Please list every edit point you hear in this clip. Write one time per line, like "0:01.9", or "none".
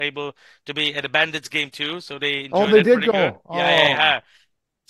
none